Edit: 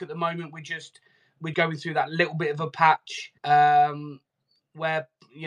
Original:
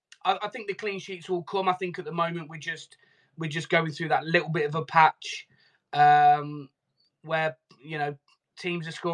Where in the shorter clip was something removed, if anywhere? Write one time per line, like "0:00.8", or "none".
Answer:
0:01.5
0:03.4